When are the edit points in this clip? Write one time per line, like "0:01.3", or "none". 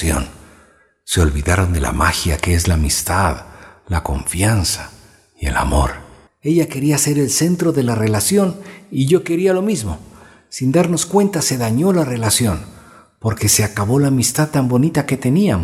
0:06.3